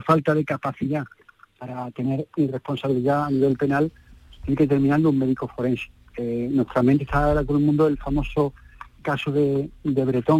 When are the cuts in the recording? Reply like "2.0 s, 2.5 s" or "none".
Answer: none